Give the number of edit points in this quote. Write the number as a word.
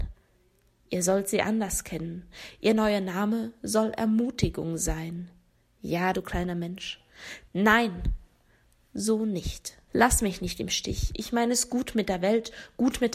three